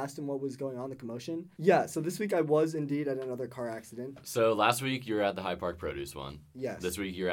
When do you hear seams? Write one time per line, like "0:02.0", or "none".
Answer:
0:01.6